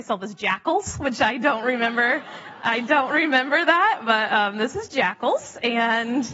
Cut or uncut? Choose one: uncut